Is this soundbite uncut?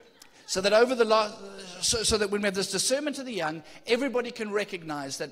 yes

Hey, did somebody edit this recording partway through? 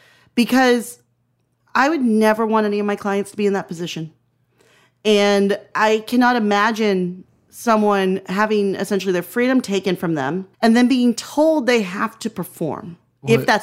yes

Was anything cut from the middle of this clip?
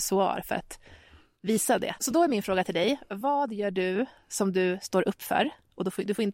yes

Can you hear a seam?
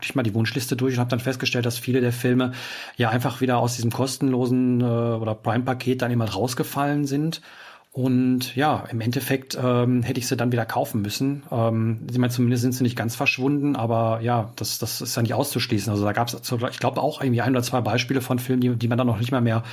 no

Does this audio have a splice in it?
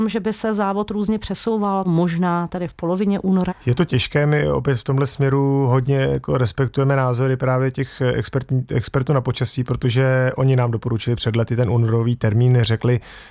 yes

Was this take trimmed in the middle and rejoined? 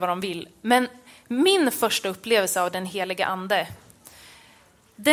no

